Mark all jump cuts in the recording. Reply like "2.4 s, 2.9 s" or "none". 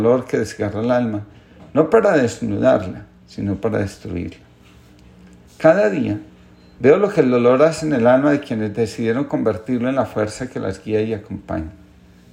none